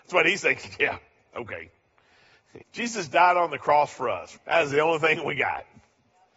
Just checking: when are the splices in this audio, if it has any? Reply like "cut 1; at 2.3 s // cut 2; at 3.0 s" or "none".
cut 1; at 2.6 s // cut 2; at 4.4 s

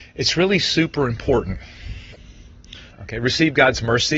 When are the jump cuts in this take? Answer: cut 1; at 2.9 s

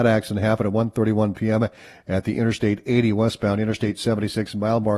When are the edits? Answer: none

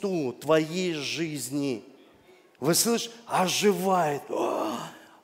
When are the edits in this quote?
none

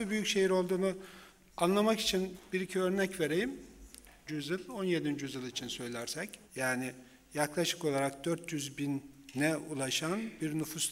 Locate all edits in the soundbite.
cut 1; at 4.3 s // cut 2; at 6.4 s

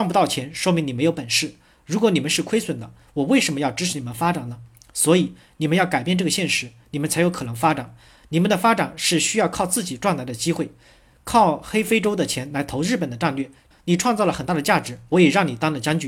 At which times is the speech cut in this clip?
cut 1; at 13.7 s

